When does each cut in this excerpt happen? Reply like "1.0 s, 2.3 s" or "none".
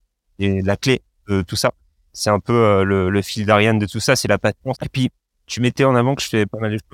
4.7 s

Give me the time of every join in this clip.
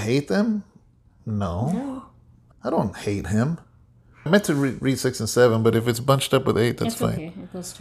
2.5 s, 4.3 s

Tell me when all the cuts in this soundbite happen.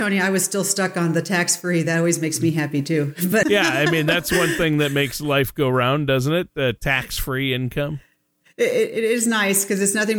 3.4 s

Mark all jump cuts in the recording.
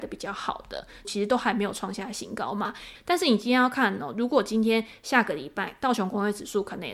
1.0 s, 2.9 s

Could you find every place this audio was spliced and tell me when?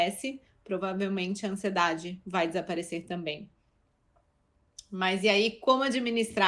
none

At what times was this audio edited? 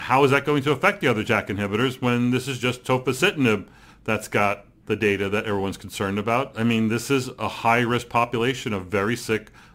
6.5 s

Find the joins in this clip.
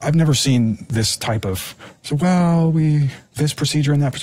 2.0 s, 3.3 s

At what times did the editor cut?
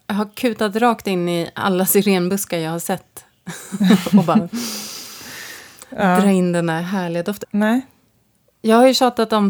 7.4 s

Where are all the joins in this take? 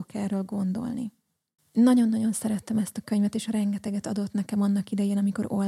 1.6 s

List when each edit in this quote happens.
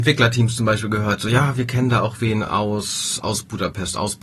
none

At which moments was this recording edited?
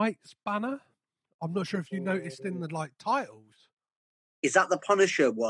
none

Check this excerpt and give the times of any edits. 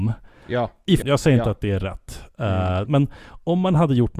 1.0 s, 2.9 s

